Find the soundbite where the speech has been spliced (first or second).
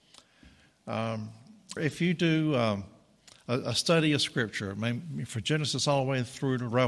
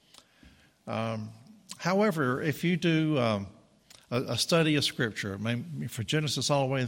first